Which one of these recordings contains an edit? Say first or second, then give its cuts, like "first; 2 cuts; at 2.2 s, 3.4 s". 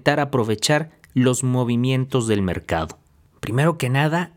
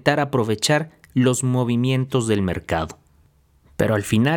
first; 1 cut; at 3.3 s